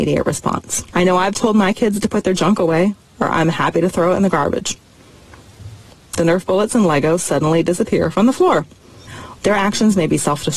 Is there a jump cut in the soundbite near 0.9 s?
no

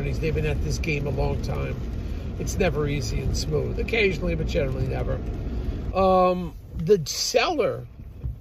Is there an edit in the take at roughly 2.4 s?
yes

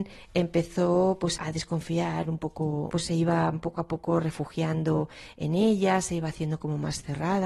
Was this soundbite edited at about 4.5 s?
no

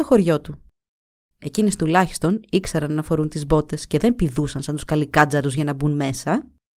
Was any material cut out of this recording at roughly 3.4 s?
no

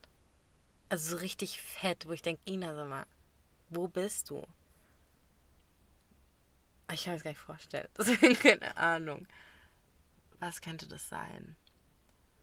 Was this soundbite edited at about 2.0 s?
no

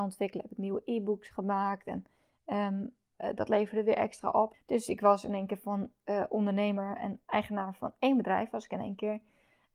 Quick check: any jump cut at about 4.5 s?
yes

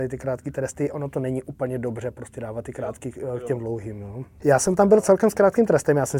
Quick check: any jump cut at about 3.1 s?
no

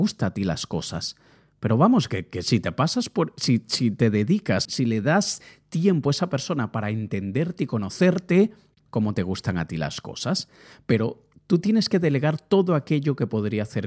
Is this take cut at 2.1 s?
no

